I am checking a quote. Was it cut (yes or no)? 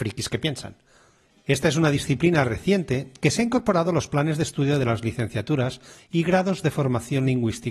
yes